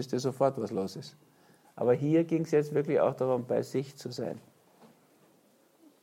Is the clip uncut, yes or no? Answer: no